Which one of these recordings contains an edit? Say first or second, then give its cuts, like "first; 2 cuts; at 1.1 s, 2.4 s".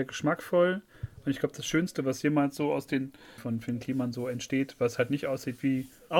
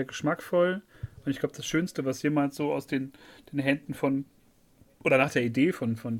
first; 1 cut; at 3.4 s